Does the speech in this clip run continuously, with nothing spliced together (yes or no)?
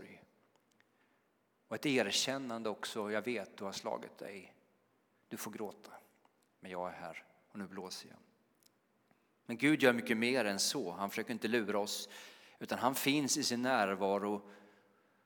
yes